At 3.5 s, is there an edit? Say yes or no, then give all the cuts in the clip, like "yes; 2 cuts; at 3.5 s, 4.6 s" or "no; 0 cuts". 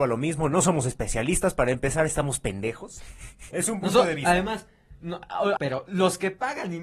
yes; 2 cuts; at 3.5 s, 5.6 s